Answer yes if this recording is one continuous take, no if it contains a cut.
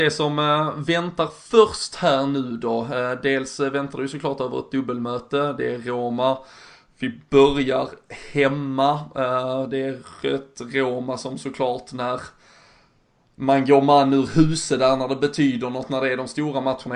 yes